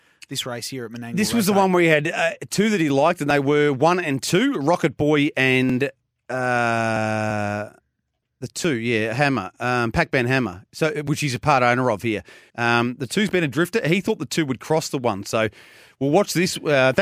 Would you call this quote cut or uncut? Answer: cut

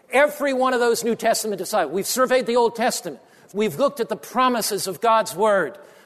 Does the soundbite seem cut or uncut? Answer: uncut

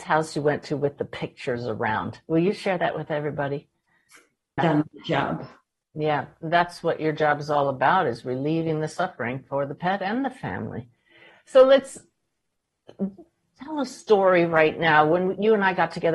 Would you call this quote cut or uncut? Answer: cut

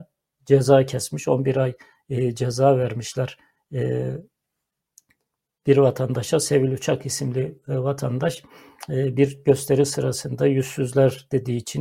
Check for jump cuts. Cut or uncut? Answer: uncut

